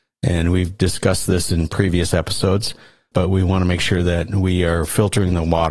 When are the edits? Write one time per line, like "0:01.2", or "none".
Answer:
0:03.1